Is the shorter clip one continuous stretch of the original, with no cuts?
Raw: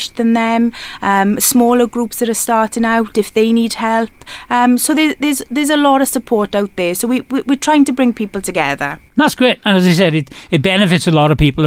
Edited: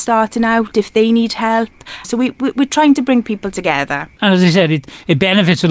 no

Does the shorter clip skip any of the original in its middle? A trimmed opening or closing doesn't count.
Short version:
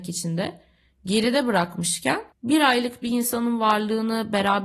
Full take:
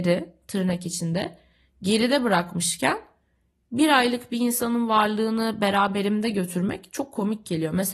yes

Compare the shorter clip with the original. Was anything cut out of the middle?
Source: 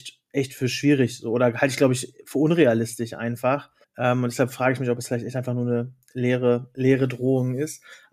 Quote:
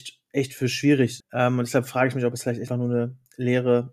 yes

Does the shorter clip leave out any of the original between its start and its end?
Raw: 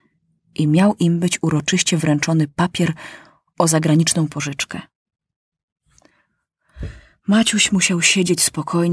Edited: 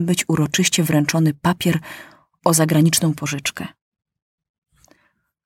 no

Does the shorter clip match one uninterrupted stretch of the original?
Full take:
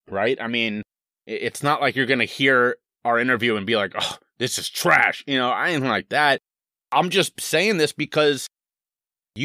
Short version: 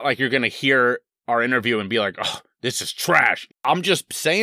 no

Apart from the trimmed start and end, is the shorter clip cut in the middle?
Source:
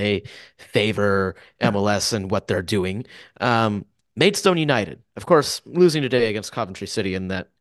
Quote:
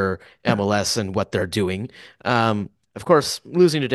yes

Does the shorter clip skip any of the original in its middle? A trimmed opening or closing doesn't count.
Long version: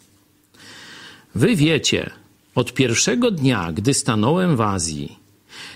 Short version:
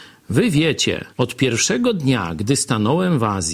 yes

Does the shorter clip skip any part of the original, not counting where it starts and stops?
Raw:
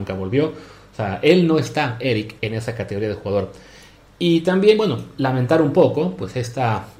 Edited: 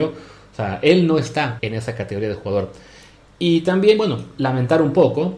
yes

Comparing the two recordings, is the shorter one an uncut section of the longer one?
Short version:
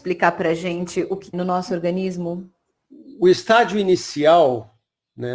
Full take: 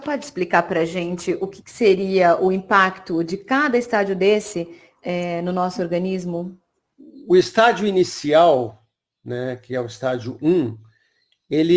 no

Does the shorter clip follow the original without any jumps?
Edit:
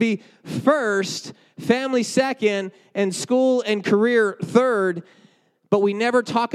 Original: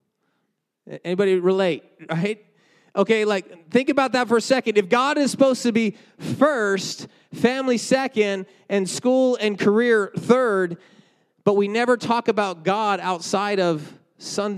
yes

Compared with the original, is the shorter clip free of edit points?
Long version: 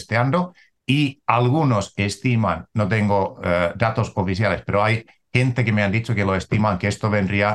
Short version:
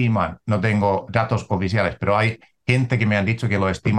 no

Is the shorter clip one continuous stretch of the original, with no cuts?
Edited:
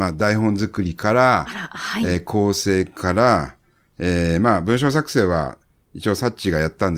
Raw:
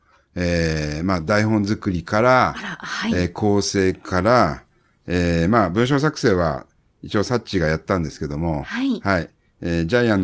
yes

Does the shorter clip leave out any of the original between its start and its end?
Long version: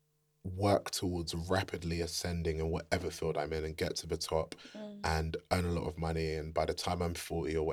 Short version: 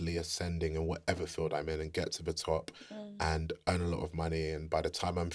no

